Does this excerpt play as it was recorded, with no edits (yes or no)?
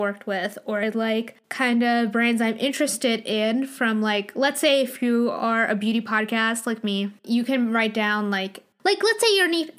yes